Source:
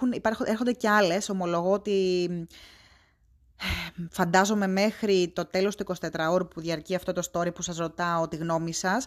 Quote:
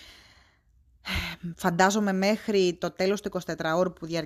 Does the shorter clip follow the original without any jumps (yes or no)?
yes